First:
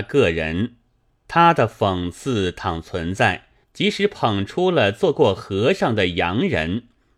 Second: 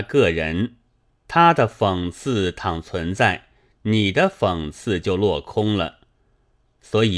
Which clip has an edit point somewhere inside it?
first; 1 cut; at 3.6 s

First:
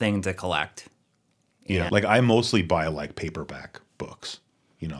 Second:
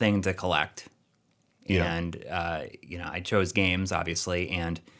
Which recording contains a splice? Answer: first; 1 cut; at 1.9 s

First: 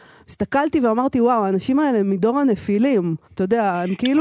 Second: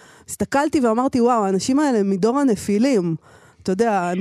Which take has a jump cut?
first; 1 cut; at 3.2 s

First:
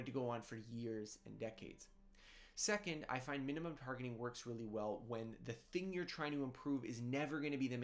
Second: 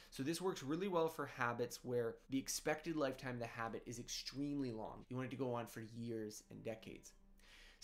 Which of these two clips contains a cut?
second; 2 cuts; at 2.2 s, 5.0 s

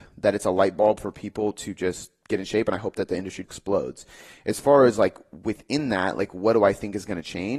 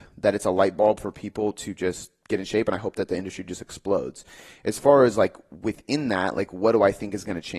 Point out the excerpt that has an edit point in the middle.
first; 1 cut; at 3.4 s

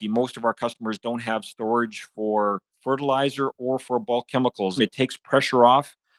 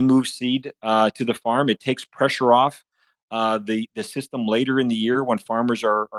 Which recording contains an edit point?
first; 2 cuts; at 2.7 s, 4.8 s

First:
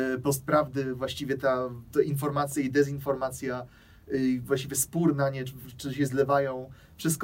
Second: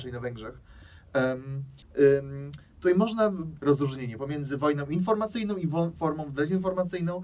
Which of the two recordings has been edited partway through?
second; 2 cuts; at 1.8 s, 3.6 s

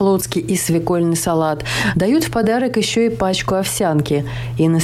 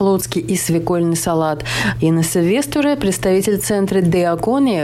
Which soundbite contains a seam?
second; 1 cut; at 1.9 s

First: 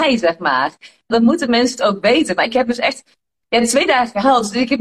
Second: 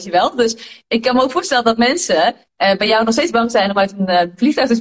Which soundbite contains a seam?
first; 1 cut; at 1.1 s

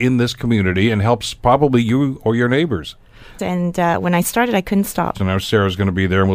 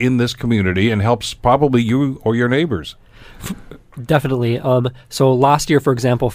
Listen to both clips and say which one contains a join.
first; 2 cuts; at 3.4 s, 5.1 s

